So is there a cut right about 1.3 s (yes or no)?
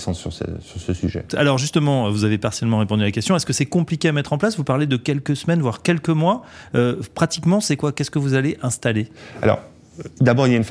yes